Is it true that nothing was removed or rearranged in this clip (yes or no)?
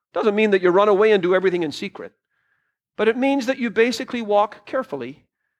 yes